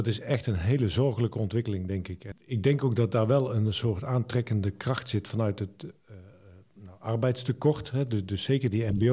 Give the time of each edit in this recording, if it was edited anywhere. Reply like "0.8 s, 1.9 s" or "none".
2.3 s